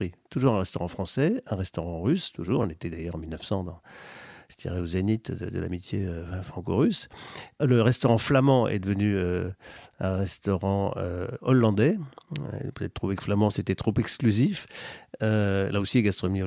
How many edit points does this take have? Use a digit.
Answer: 0